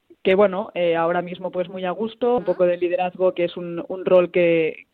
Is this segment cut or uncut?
cut